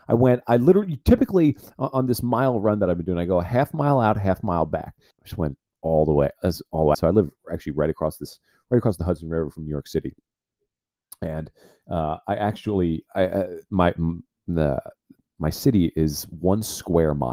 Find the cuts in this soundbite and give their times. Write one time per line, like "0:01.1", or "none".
0:05.1
0:06.9

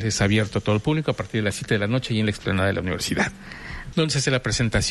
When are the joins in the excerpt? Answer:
0:03.9

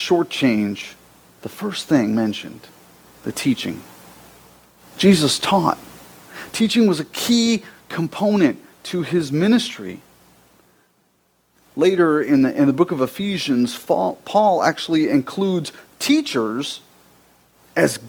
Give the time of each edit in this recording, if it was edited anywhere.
none

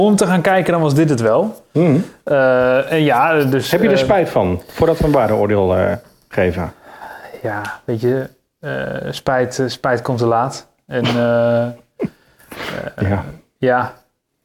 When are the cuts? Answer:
none

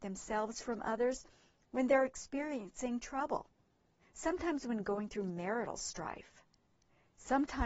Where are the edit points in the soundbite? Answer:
0:04.0

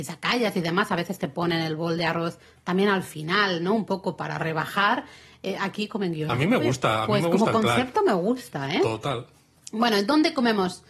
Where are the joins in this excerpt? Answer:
none

